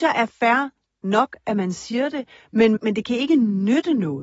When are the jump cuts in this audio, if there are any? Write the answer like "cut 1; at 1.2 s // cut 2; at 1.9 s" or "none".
cut 1; at 2.8 s